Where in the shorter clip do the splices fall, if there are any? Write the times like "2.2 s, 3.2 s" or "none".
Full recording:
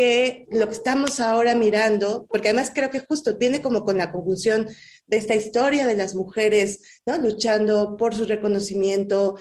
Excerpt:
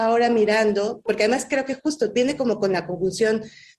none